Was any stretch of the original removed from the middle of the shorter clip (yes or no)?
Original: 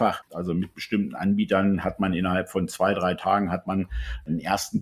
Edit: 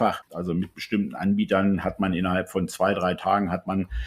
no